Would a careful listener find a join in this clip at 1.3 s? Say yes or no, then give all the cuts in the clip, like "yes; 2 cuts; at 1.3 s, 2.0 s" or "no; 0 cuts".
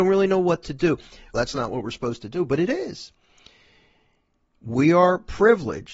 yes; 1 cut; at 1.3 s